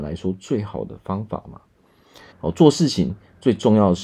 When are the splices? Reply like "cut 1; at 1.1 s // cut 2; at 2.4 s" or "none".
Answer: cut 1; at 2.3 s